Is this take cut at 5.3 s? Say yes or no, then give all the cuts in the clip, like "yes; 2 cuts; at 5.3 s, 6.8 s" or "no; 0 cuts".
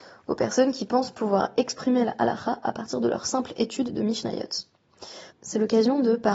yes; 1 cut; at 5.3 s